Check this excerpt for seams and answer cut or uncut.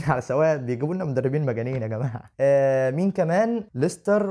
cut